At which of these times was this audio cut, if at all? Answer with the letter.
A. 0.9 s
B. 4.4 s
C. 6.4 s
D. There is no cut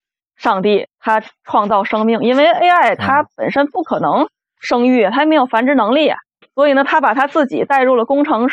C